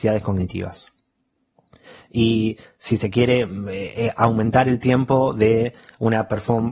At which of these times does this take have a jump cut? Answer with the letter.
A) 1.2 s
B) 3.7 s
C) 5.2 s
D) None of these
D